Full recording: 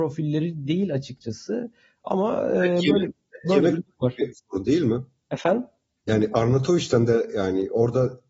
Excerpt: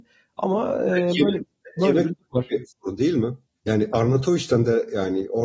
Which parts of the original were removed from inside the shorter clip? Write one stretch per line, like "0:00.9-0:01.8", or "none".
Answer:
0:05.1-0:05.9